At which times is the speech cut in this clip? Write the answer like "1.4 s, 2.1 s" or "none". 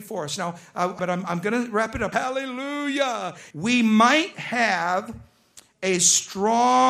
1.0 s, 2.1 s, 3.5 s